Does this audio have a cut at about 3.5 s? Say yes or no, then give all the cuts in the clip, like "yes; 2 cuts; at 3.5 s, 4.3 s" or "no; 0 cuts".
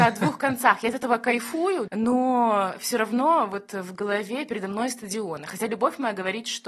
no; 1 cut; at 1.9 s